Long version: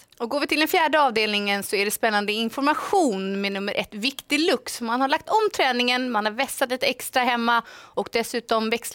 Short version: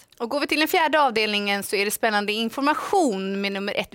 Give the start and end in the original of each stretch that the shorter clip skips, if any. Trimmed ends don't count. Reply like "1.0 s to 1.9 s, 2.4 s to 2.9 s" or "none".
none